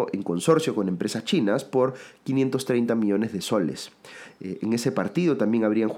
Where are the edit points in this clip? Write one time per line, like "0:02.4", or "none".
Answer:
none